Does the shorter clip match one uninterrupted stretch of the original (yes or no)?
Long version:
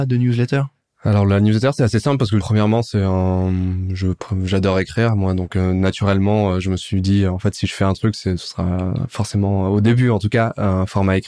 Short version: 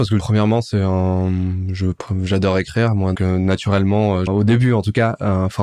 no